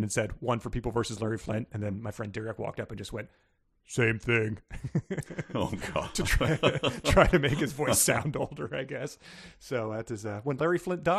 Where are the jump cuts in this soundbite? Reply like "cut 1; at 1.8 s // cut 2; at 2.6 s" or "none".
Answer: none

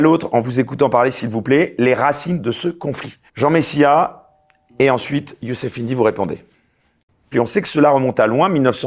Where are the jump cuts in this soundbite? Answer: cut 1; at 3.3 s // cut 2; at 7.3 s

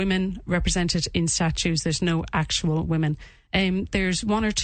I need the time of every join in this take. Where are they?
none

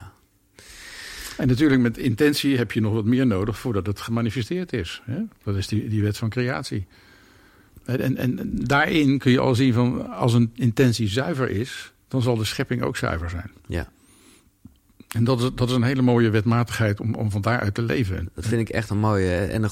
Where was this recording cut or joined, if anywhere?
cut 1; at 12.0 s

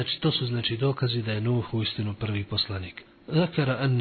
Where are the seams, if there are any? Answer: cut 1; at 3.1 s

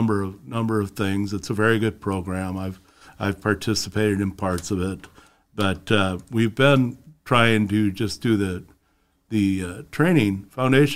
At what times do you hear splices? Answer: cut 1; at 5.5 s

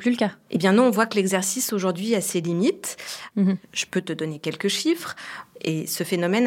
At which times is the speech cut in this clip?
cut 1; at 3.3 s // cut 2; at 5.5 s

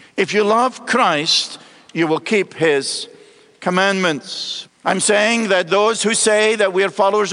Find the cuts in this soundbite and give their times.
cut 1; at 4.7 s

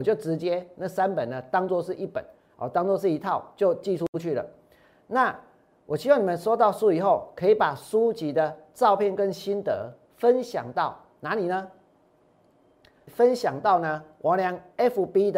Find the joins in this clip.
none

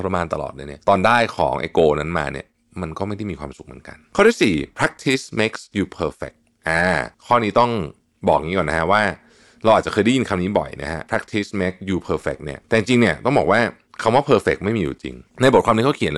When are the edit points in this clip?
cut 1; at 7.1 s // cut 2; at 12.6 s

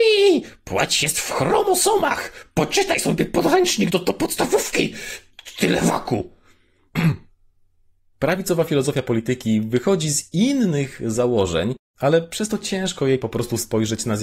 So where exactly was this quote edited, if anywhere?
cut 1; at 3.9 s

